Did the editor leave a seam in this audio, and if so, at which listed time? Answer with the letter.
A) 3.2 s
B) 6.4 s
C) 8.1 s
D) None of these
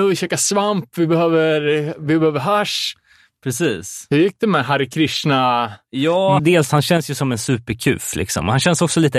B